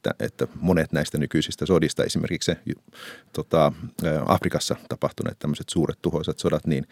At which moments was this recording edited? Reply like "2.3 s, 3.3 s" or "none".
none